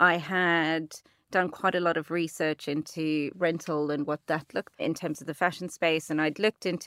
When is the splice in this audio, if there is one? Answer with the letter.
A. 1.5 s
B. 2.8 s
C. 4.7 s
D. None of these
C